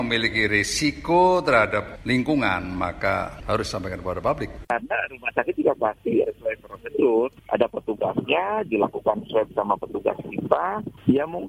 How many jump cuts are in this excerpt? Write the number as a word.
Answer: two